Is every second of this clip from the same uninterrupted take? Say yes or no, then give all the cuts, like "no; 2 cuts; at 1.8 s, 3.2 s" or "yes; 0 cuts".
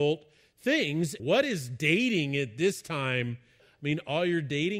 no; 2 cuts; at 1.2 s, 3.6 s